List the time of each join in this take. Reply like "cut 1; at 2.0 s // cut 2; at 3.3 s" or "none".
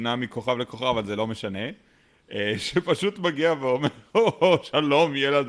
none